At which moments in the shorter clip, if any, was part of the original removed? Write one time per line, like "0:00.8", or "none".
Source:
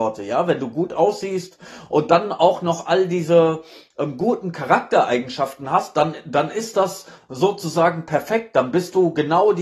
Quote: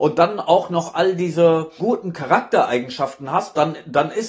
0:01.8